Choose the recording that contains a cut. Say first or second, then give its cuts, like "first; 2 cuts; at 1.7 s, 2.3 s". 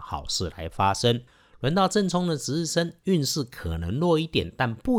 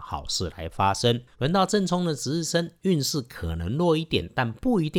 second; 1 cut; at 1.3 s